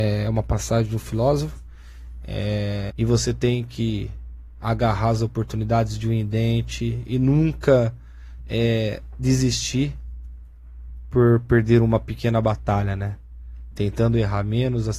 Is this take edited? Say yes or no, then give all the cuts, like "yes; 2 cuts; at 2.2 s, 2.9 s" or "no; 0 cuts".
yes; 2 cuts; at 2.9 s, 13.7 s